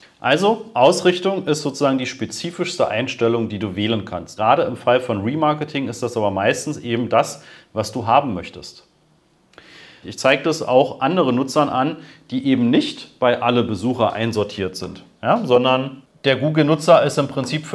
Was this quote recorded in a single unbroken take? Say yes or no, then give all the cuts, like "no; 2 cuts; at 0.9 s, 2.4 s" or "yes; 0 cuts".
no; 2 cuts; at 4.4 s, 10.0 s